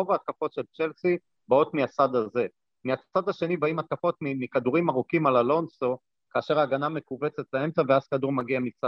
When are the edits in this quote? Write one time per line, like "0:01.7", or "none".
none